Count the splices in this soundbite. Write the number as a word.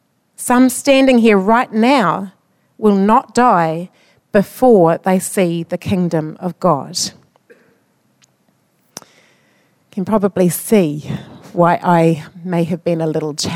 zero